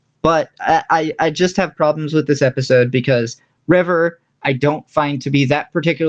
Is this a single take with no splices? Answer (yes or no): yes